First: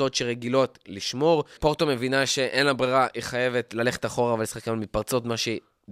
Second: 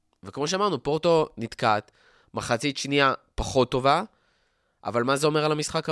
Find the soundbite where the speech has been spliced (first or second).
first